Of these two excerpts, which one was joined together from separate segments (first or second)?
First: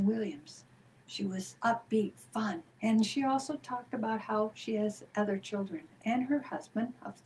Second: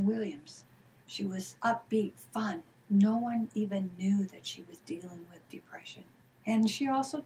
first